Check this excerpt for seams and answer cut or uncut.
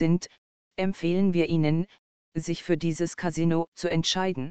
uncut